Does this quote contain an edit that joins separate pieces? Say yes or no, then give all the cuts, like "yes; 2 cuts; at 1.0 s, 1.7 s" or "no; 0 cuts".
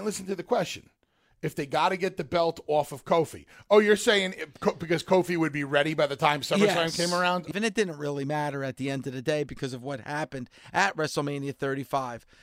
yes; 1 cut; at 7.5 s